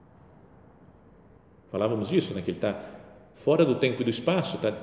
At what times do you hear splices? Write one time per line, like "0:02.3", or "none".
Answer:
none